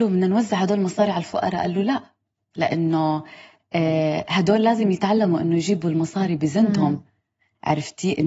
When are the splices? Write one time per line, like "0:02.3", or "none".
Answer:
none